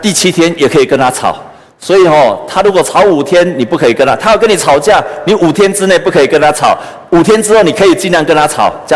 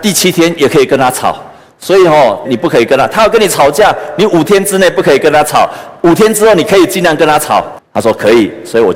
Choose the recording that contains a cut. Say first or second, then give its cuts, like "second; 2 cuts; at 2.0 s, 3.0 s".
second; 2 cuts; at 2.4 s, 7.8 s